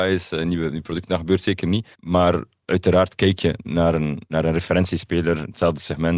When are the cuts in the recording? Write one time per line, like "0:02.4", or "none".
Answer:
0:01.9